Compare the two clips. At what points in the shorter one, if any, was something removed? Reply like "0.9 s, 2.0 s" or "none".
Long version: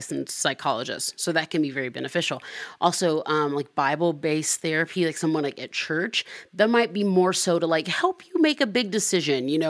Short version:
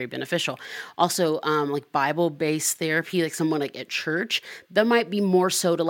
none

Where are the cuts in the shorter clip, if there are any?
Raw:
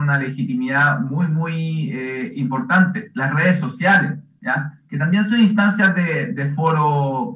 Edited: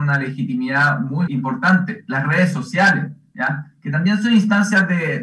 1.3 s

